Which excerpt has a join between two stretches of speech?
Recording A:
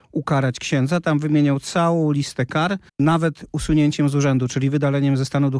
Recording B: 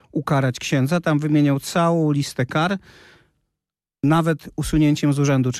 A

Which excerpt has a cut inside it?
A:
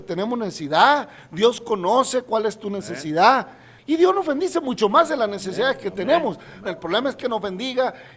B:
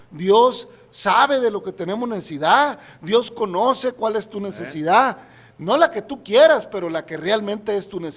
A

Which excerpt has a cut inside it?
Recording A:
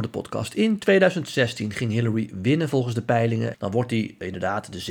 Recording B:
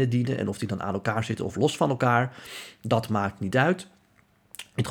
A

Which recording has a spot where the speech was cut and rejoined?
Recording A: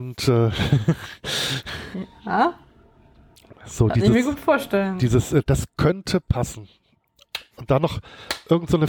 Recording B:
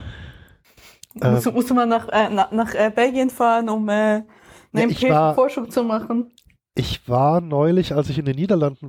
A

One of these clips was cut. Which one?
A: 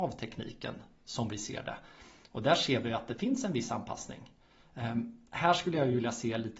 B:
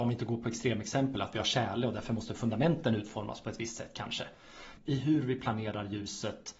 B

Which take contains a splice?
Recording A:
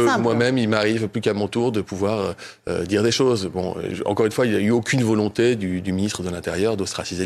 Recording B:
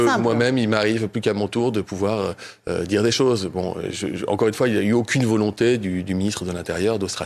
A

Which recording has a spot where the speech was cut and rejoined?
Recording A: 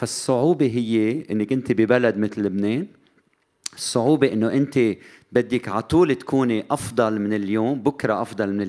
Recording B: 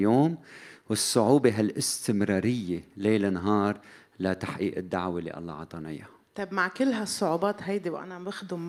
B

